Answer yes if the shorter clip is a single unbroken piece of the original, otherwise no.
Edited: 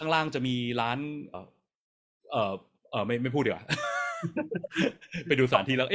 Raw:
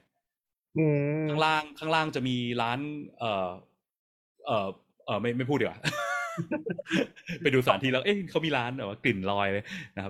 no